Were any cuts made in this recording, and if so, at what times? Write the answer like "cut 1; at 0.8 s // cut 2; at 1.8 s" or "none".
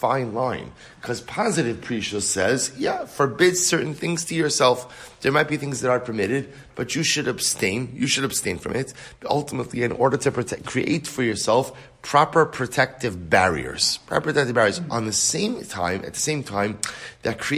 none